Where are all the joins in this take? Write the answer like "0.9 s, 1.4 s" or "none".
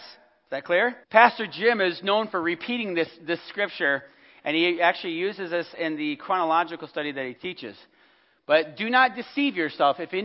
1.0 s